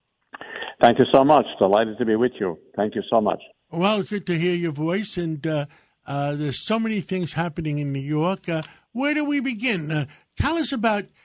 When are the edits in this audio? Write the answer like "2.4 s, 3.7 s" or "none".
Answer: 4.1 s